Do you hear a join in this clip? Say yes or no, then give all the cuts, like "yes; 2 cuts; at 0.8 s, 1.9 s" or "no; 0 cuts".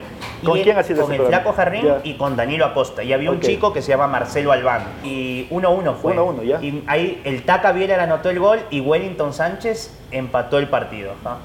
yes; 1 cut; at 5.0 s